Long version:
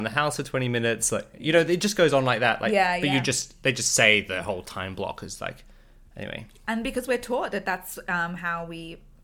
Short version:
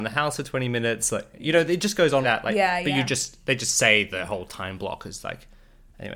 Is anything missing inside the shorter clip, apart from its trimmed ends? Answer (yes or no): yes